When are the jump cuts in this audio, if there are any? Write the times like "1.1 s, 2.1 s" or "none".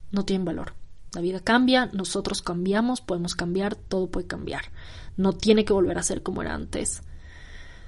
1.1 s